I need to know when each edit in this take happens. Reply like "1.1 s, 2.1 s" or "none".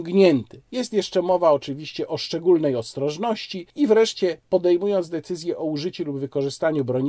3.7 s